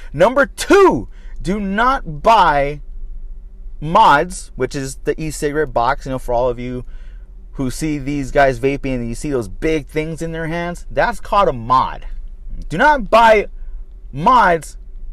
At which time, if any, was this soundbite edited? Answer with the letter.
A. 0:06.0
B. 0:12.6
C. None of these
B